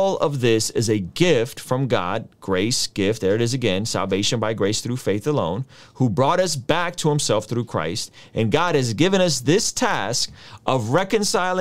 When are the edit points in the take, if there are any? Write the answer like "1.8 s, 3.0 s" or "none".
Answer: none